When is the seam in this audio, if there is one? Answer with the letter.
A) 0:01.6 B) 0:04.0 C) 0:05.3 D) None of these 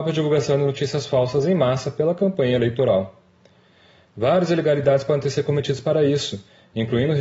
B